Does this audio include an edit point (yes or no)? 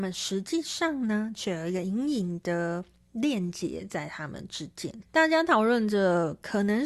yes